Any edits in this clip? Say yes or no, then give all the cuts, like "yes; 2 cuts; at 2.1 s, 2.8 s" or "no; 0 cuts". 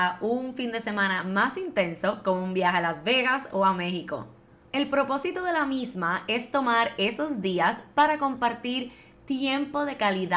yes; 1 cut; at 4.6 s